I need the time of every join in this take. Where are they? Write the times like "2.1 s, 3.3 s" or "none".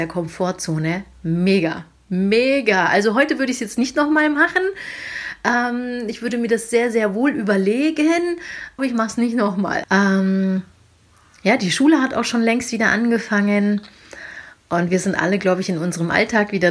8.8 s, 9.8 s